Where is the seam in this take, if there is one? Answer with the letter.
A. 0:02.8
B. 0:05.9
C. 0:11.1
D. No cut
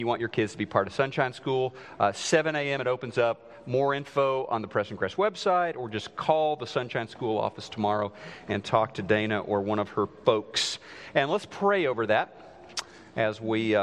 D